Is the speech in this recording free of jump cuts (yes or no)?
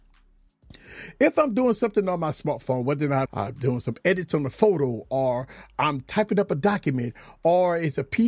no